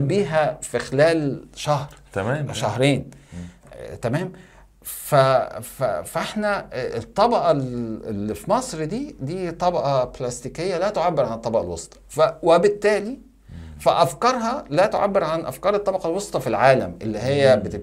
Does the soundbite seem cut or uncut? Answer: uncut